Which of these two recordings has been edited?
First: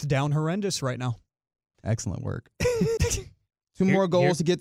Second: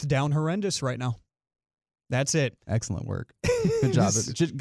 first; 2 cuts; at 1.7 s, 3.0 s

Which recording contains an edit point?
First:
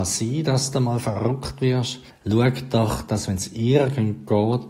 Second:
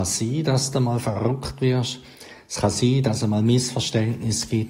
first; 1 cut; at 2.1 s

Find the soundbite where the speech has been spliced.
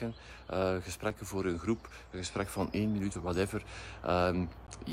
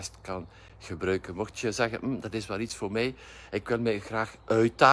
first; 1 cut; at 3.1 s

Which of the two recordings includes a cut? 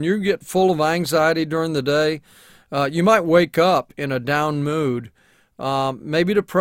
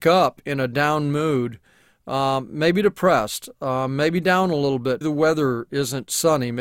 second; 1 cut; at 5.0 s

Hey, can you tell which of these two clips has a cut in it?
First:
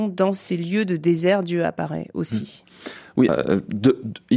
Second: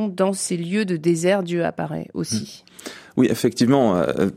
first; 1 cut; at 3.3 s

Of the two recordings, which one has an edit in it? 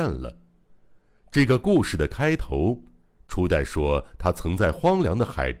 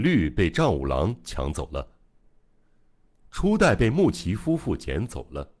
second; 1 cut; at 3.2 s

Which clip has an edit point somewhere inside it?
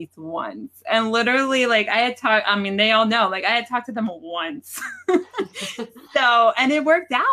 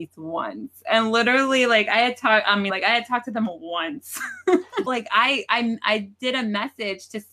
second; 2 cuts; at 2.7 s, 4.9 s

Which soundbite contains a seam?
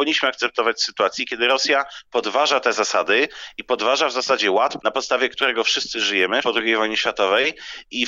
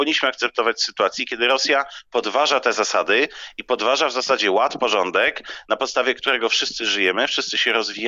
first; 2 cuts; at 4.8 s, 6.4 s

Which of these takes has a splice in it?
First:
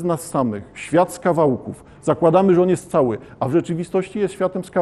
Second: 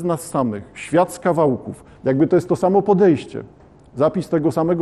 second; 1 cut; at 1.9 s

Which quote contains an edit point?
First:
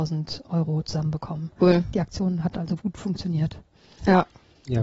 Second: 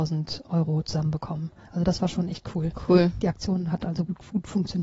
first; 2 cuts; at 1.6 s, 2.8 s

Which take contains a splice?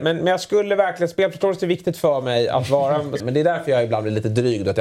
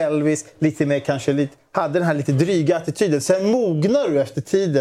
first; 1 cut; at 3.2 s

